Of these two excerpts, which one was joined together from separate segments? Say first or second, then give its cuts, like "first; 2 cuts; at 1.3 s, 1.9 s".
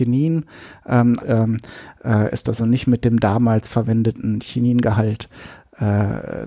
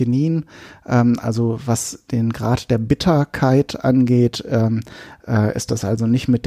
first; 2 cuts; at 1.2 s, 2.6 s